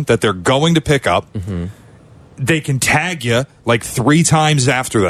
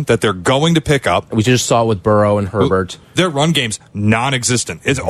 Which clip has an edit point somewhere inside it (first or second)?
second